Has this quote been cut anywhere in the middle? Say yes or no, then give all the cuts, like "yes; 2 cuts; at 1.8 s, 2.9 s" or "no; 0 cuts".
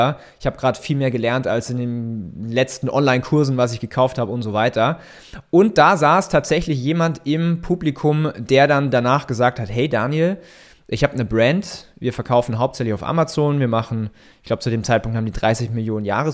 no; 0 cuts